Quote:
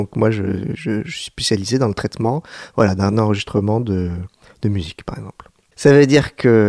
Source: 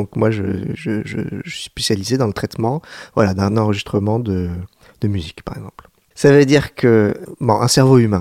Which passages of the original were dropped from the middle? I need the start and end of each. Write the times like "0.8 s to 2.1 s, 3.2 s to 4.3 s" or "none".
1.0 s to 1.4 s